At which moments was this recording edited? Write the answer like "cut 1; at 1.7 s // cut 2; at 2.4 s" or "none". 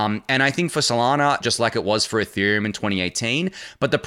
cut 1; at 1.4 s